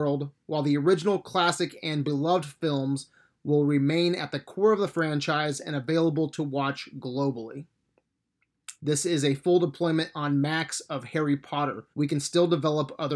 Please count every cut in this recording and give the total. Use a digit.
2